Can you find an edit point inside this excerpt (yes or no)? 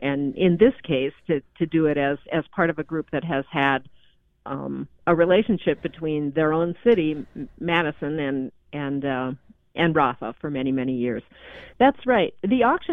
yes